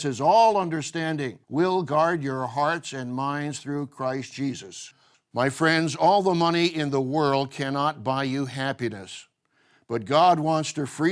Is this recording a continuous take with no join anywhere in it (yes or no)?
no